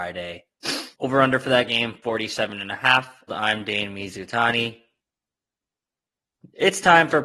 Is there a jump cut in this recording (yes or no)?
yes